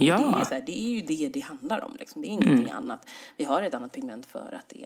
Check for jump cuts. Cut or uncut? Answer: uncut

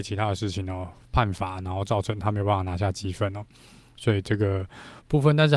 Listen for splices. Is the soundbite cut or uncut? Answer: uncut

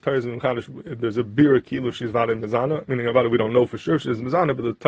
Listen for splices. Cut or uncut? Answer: uncut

